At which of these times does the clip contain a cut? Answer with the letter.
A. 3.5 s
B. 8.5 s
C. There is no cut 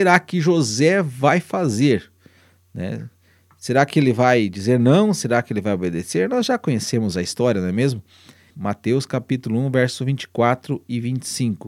B